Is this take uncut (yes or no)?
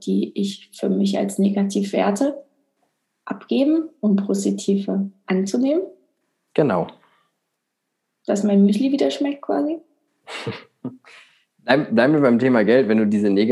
yes